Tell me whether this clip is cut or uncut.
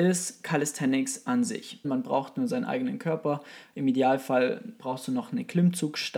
cut